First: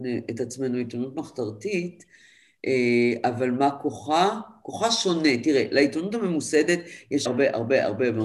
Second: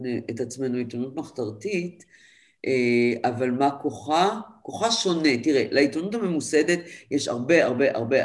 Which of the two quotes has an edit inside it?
first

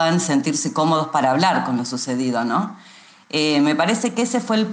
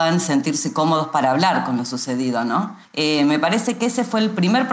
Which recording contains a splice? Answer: second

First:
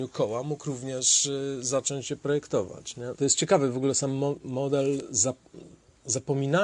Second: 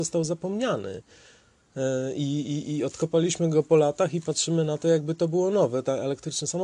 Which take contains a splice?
first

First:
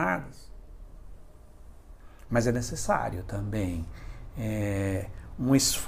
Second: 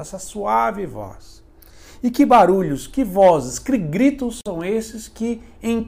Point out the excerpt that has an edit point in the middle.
first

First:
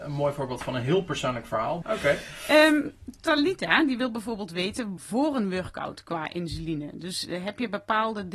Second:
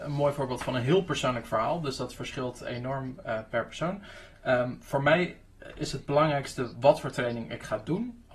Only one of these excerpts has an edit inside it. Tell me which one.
first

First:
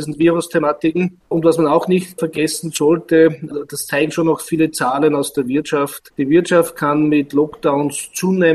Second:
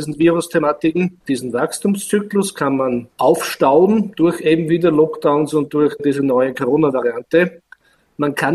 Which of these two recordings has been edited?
second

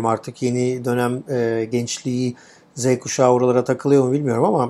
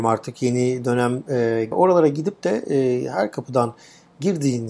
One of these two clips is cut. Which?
second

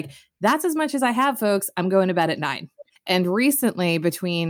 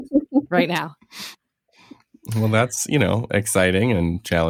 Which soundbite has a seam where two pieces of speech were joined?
first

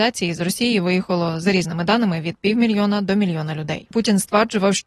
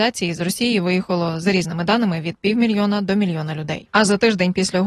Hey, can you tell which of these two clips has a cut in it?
first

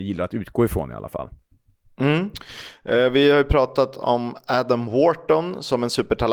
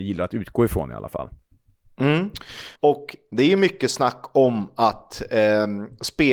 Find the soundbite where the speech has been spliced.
second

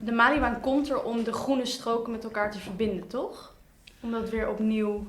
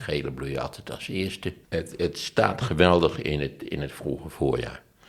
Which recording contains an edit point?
second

